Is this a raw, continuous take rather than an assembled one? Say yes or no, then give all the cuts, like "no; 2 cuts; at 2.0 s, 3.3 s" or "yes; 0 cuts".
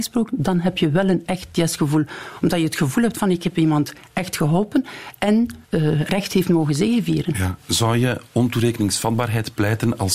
no; 1 cut; at 5.6 s